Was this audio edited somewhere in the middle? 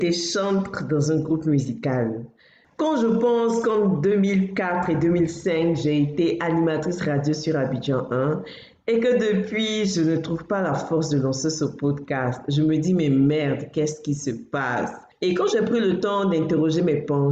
no; 0 cuts

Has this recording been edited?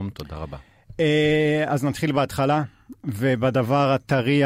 no; 0 cuts

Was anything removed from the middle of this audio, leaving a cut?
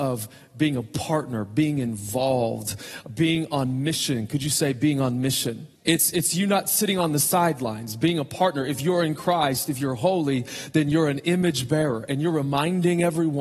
yes; 1 cut; at 5.8 s

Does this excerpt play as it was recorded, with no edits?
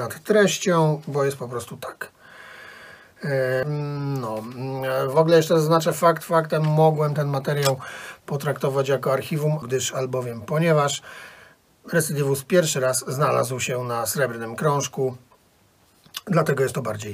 no; 2 cuts; at 3.6 s, 9.6 s

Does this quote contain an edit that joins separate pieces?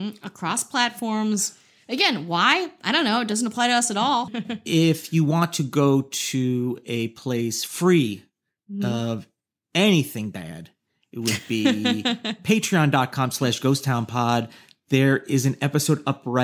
no; 0 cuts

